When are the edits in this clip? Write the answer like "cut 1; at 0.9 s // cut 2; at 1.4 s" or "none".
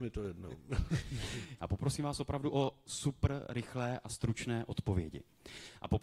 cut 1; at 1.6 s